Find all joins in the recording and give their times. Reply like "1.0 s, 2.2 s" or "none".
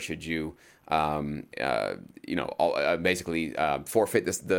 none